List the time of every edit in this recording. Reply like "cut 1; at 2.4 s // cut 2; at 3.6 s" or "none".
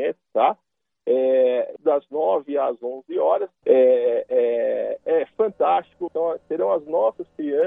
cut 1; at 1.8 s // cut 2; at 3.6 s // cut 3; at 6.1 s